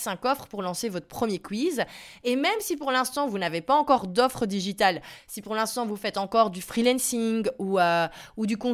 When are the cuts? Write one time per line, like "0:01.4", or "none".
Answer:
none